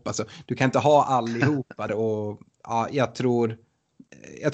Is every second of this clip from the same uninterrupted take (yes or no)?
no